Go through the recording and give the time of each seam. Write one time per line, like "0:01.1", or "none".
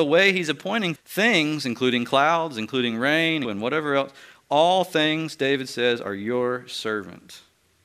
0:01.0
0:03.4